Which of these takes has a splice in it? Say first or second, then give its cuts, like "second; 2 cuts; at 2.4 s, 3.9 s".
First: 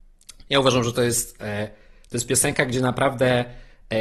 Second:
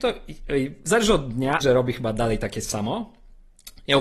second; 1 cut; at 1.6 s